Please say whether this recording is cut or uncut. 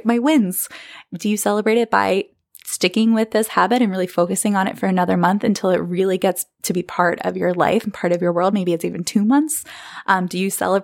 uncut